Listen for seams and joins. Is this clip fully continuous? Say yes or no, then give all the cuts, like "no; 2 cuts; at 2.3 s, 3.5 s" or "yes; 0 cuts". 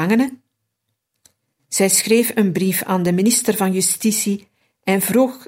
no; 1 cut; at 1.6 s